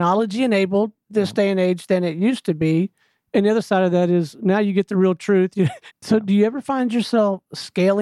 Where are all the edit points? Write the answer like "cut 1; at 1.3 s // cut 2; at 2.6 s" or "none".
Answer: cut 1; at 5.9 s